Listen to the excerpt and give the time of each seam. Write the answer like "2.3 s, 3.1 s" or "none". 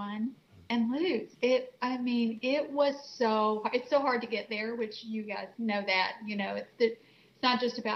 1.3 s